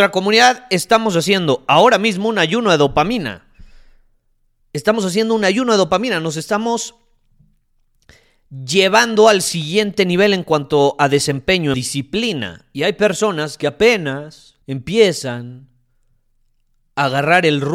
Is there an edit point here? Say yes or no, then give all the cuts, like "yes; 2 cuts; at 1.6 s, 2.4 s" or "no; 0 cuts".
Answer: yes; 2 cuts; at 11.7 s, 14.6 s